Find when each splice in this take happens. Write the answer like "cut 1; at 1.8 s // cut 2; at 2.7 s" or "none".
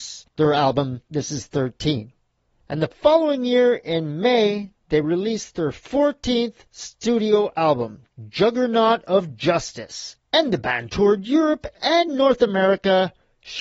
none